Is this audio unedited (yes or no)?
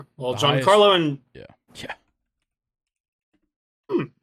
no